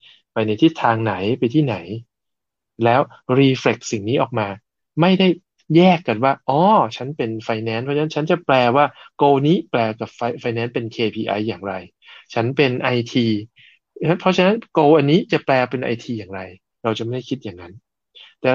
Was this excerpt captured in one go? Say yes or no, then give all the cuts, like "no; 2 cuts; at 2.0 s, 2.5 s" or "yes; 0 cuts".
yes; 0 cuts